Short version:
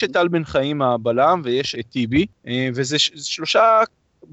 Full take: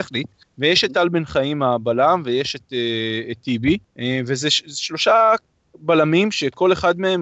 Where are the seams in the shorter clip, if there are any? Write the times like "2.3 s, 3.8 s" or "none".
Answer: 1.7 s